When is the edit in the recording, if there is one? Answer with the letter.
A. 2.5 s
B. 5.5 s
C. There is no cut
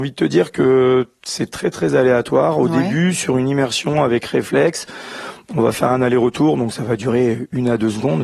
C